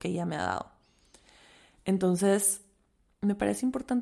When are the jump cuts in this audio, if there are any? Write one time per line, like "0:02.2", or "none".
none